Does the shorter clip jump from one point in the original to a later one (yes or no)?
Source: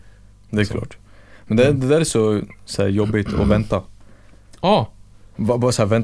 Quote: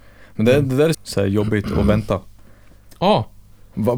yes